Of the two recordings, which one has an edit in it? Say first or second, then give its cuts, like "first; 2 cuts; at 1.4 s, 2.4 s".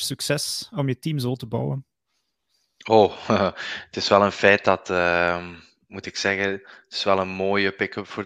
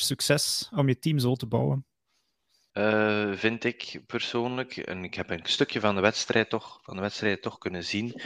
second; 1 cut; at 2.7 s